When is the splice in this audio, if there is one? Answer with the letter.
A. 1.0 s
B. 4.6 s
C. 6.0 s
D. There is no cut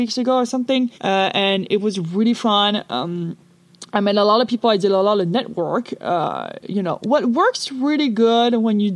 A